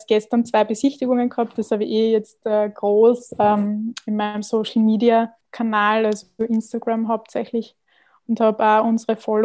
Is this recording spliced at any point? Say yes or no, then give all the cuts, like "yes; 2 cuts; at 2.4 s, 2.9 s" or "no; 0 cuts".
no; 0 cuts